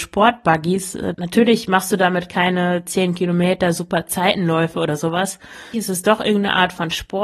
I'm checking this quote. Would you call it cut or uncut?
cut